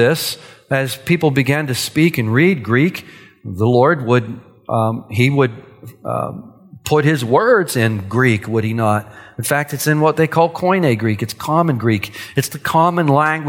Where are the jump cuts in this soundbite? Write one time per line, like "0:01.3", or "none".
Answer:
none

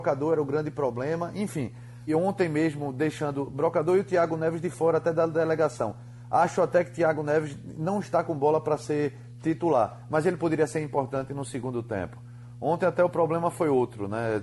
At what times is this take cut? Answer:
0:02.1

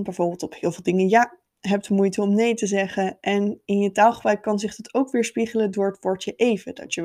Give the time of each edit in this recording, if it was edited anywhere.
none

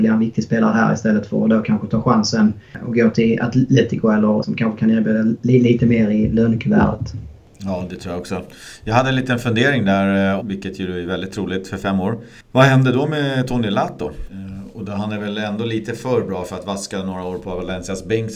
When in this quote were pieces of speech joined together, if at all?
0:04.4
0:10.4
0:14.3

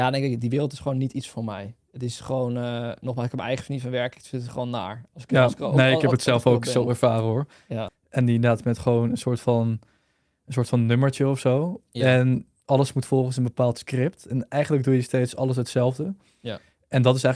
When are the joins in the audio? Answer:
0:07.9

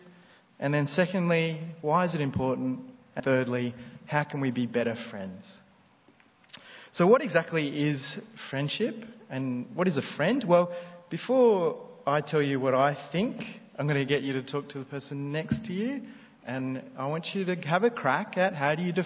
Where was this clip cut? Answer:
0:03.2

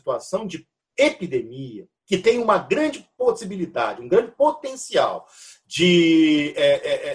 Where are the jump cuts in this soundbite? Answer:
0:02.0

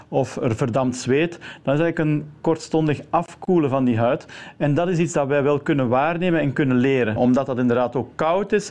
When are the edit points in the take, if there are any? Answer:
0:07.2

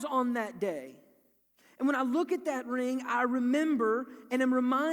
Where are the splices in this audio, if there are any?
none

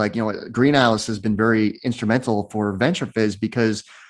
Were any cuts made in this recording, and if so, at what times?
none

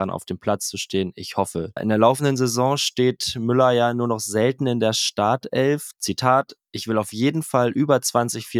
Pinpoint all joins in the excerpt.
0:01.8
0:05.9

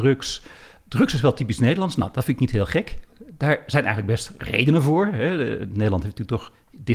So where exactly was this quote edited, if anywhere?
none

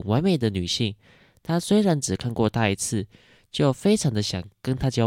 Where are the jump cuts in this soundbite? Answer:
none

